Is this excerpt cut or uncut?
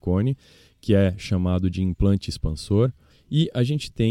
cut